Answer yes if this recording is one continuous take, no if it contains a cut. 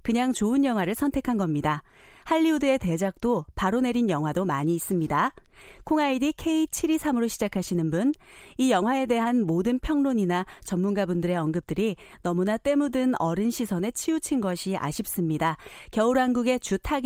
yes